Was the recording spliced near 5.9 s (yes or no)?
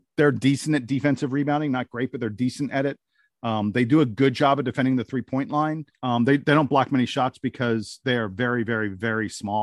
yes